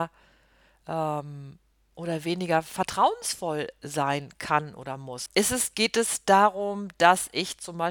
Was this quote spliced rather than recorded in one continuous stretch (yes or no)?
yes